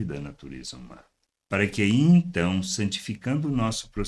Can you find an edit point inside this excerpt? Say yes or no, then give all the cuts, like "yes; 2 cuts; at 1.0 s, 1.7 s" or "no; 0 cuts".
no; 0 cuts